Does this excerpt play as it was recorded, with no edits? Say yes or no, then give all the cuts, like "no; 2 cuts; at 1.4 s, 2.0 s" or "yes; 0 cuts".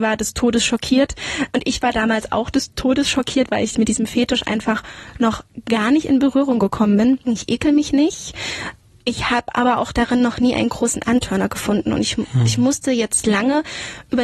no; 1 cut; at 7.3 s